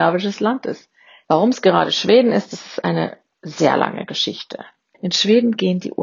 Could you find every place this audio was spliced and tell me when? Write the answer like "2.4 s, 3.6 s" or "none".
1.2 s, 4.9 s